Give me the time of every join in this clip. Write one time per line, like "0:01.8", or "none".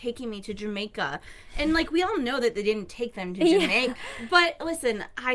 0:04.0

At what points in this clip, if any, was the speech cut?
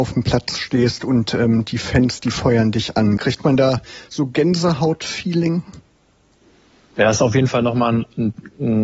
0:03.2

